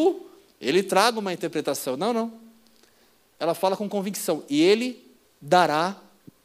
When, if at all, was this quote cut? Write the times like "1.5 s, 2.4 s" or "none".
none